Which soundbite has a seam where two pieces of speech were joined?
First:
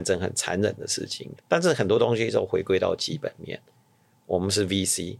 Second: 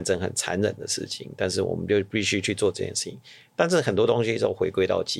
first; 1 cut; at 1.4 s

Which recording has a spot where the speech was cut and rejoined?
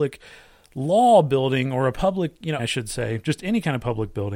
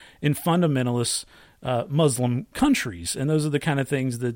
first; 1 cut; at 2.6 s

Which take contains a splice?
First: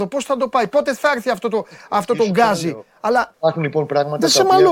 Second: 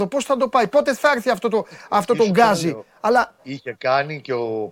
first; 1 cut; at 3.3 s

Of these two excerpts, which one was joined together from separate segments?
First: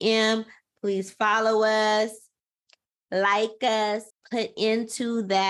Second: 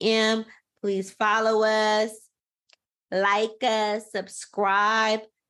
first; 1 cut; at 4.1 s

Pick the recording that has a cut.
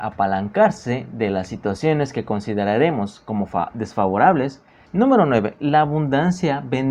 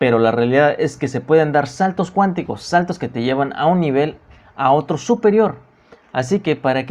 first; 1 cut; at 4.9 s

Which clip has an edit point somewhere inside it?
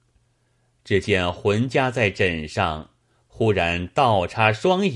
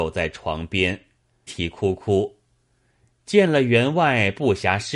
second; 1 cut; at 1.5 s

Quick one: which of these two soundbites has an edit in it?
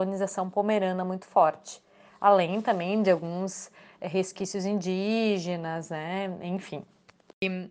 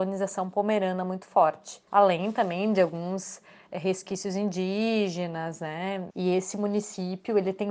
second; 2 cuts; at 1.9 s, 6.1 s

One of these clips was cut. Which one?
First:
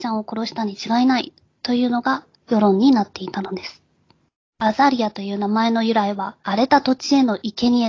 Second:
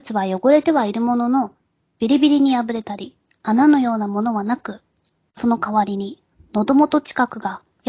first; 2 cuts; at 4.4 s, 6.4 s

